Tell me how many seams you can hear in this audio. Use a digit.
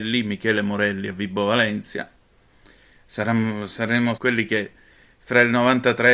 1